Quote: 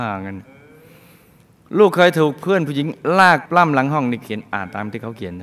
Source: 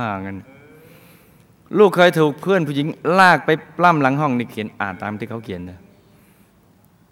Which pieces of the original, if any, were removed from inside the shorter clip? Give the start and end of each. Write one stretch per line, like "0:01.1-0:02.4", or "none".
0:03.5-0:03.7

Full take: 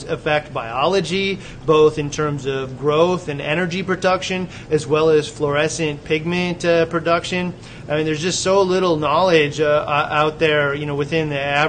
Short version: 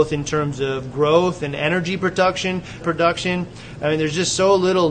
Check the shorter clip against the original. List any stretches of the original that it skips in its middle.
0:04.7-0:06.9

